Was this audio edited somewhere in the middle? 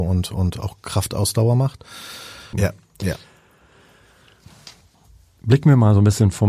yes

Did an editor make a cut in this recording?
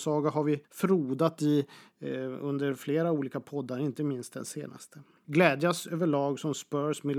yes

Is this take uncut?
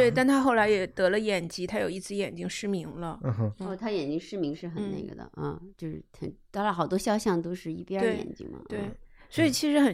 yes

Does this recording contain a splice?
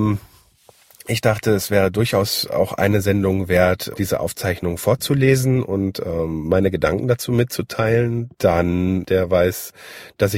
yes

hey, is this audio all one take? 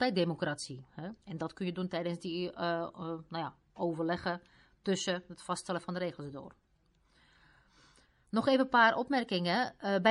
no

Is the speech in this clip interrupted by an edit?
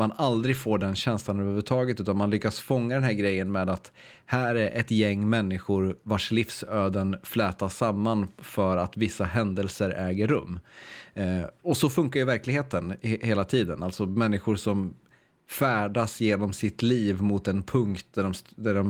no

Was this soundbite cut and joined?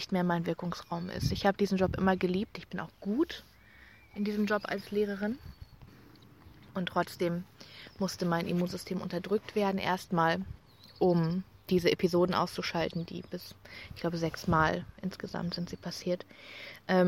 no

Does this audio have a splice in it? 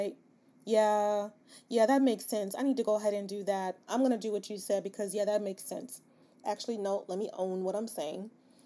yes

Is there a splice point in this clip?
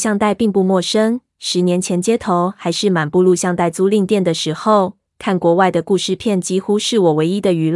no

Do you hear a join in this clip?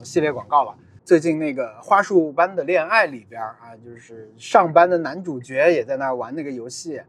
yes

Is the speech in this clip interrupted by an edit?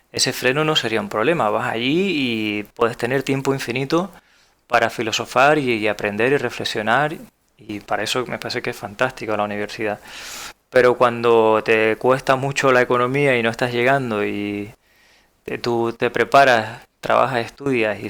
no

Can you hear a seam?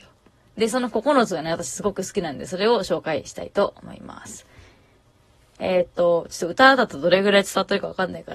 no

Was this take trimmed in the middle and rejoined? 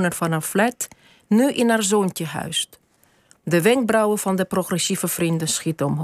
no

